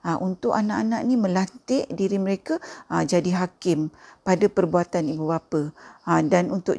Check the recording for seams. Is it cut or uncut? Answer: uncut